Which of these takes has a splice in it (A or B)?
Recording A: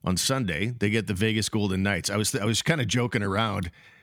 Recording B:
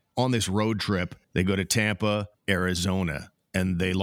B